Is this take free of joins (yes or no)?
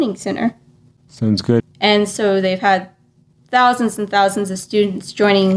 no